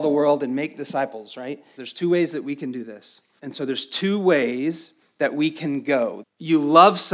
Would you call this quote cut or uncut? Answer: cut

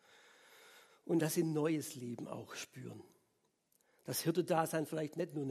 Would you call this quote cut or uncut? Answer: uncut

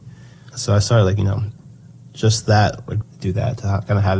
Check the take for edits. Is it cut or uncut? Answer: cut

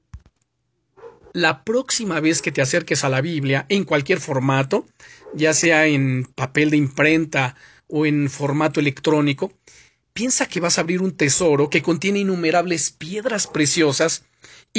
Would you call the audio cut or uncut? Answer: cut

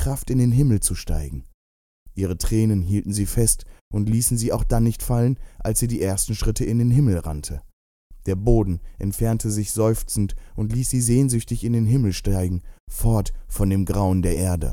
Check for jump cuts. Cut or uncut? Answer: uncut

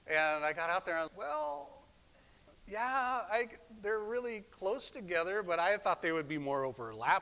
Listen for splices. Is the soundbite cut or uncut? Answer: cut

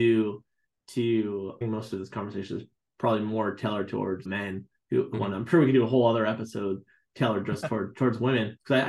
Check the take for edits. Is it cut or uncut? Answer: uncut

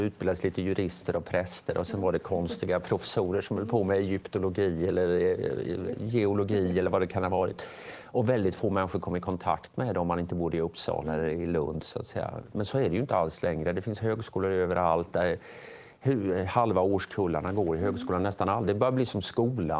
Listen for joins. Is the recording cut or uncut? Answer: uncut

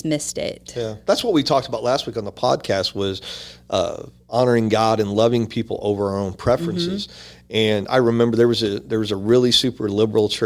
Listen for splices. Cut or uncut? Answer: uncut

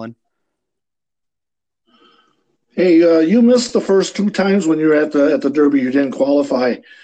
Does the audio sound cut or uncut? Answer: uncut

